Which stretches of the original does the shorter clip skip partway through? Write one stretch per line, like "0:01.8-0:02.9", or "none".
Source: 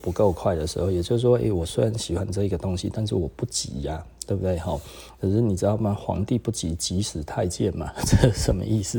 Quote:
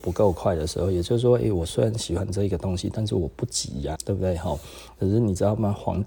0:04.0-0:04.2